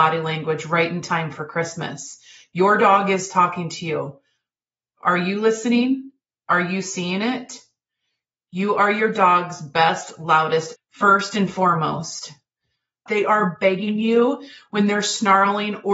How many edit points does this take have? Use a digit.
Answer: 2